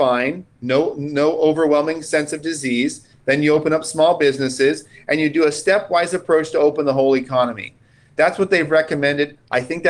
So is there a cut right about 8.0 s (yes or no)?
no